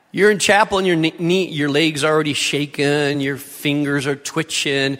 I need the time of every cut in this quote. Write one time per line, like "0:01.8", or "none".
none